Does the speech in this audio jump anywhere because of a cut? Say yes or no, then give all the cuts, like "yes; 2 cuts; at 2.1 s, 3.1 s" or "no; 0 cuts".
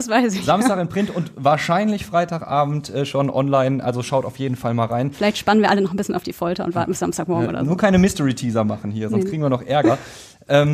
no; 0 cuts